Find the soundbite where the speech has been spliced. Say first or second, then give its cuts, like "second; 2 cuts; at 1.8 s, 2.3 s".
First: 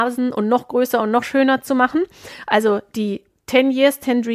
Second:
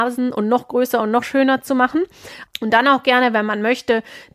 second; 1 cut; at 2.5 s